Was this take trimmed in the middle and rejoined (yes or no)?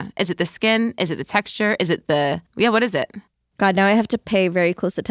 no